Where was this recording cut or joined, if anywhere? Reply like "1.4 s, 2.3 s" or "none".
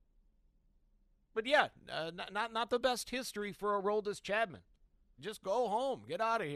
5.2 s